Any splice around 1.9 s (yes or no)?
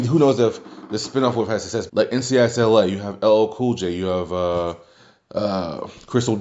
yes